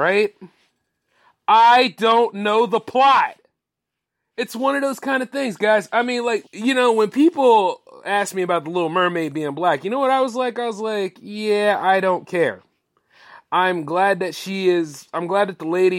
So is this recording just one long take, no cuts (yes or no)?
no